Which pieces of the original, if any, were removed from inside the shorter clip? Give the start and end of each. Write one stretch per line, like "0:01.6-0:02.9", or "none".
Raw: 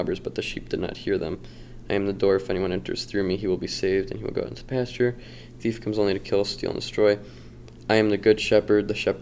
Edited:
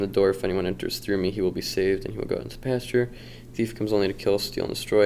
none